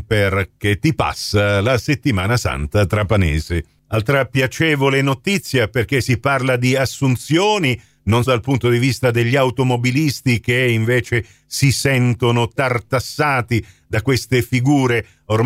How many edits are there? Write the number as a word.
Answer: one